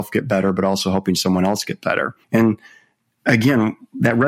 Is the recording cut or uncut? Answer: cut